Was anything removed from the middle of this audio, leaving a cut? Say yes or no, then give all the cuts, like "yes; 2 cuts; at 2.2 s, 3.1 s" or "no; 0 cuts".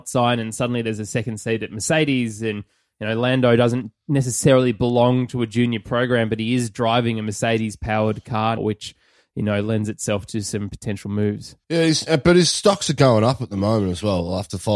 yes; 2 cuts; at 8.6 s, 11.6 s